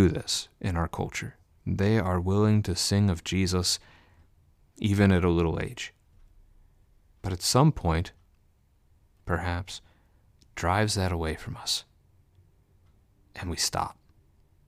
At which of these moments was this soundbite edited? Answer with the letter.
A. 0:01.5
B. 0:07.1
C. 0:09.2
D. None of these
C